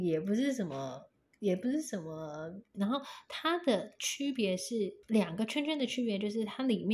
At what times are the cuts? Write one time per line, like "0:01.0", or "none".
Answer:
0:02.7
0:05.0